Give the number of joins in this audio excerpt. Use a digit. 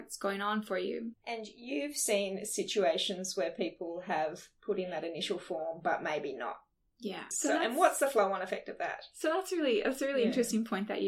2